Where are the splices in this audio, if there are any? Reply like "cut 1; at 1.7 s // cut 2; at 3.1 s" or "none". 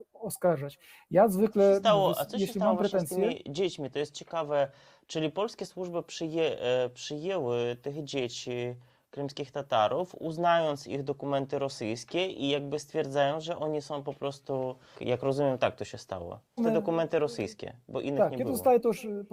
cut 1; at 14.9 s // cut 2; at 16.6 s